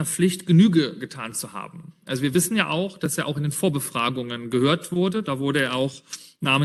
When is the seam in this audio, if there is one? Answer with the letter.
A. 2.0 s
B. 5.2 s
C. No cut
C